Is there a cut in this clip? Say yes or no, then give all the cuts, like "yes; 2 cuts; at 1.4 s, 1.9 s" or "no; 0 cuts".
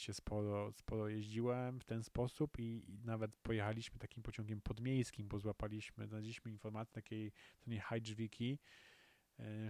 no; 0 cuts